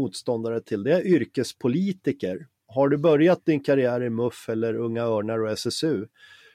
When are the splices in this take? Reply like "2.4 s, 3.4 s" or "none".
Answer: none